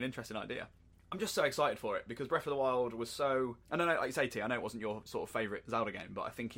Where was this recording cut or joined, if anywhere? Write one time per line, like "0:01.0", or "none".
0:03.6